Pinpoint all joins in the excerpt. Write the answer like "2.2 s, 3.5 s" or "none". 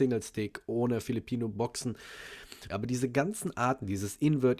2.7 s